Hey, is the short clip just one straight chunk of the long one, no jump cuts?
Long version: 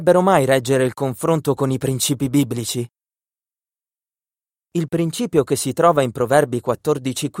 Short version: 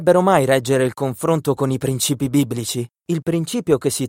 no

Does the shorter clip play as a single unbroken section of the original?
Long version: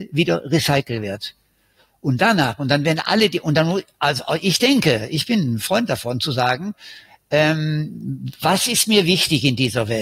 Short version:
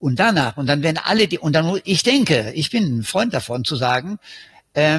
no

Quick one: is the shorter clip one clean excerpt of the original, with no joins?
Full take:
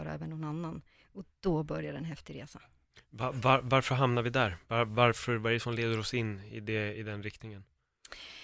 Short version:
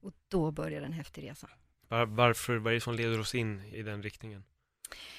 no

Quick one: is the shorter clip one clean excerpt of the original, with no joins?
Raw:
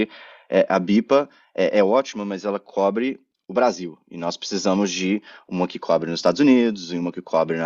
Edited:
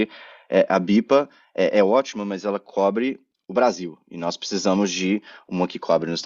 yes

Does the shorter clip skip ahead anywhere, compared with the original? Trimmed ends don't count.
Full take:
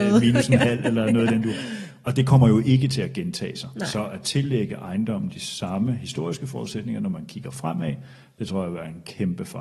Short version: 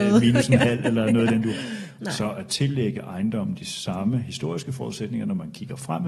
yes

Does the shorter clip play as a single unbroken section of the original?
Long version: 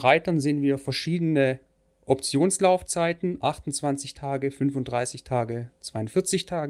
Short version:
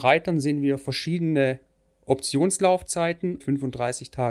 no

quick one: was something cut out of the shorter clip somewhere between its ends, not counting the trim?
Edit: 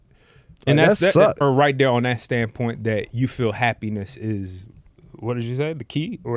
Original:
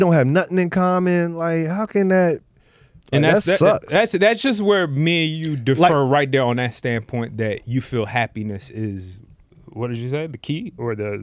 yes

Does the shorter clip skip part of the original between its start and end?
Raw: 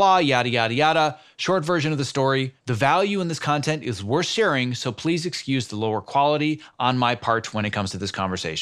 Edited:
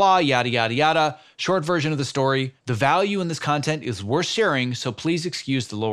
no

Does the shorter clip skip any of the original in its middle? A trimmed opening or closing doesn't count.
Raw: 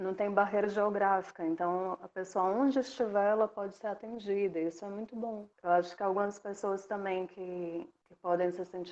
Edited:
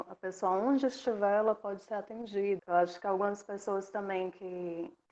yes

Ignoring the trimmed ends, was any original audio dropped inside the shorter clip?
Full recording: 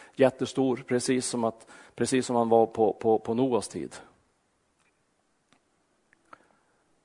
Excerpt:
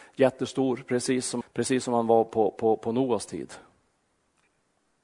yes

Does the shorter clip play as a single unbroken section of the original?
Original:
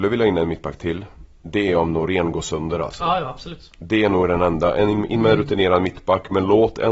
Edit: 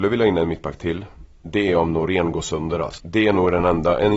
no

